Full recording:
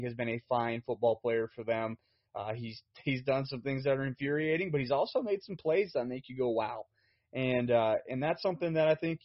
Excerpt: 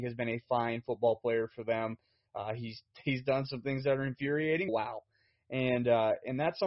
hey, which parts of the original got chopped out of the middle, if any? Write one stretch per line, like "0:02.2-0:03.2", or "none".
0:04.7-0:06.5